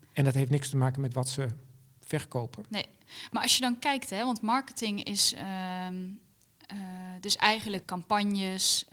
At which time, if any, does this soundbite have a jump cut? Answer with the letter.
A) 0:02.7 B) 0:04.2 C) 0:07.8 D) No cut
C